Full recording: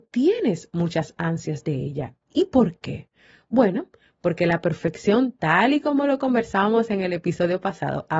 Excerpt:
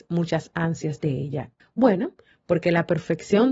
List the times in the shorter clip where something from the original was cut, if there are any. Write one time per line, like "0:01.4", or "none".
0:01.6